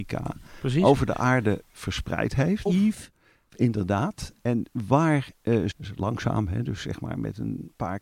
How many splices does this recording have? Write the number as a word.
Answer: two